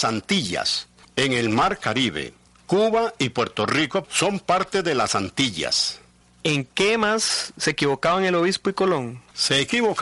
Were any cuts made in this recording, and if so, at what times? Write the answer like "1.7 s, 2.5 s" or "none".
4.0 s